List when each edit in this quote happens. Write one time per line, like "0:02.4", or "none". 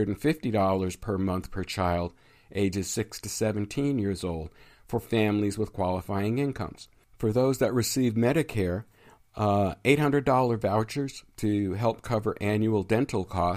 none